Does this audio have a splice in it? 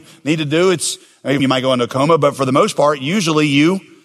yes; 1 cut; at 1.4 s

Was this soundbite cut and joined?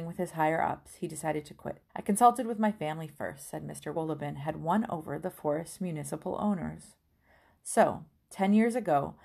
yes; 2 cuts; at 1.9 s, 3.9 s

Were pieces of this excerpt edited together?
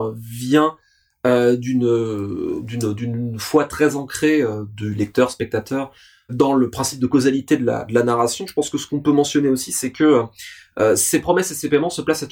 yes; 1 cut; at 6.3 s

